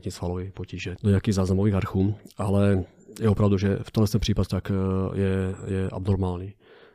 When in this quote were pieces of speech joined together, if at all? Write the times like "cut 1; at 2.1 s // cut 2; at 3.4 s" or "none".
cut 1; at 1.0 s // cut 2; at 4.5 s